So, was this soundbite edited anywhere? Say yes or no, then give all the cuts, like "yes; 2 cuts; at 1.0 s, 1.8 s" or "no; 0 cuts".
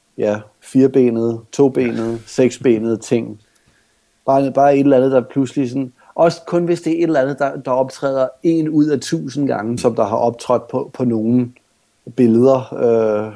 yes; 1 cut; at 9.8 s